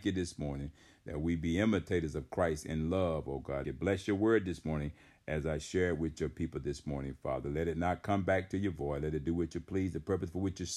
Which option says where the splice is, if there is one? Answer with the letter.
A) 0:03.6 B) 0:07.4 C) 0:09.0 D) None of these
A